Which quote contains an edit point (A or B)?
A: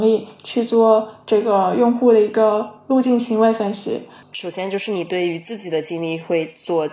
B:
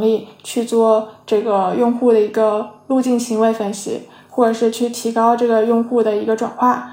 A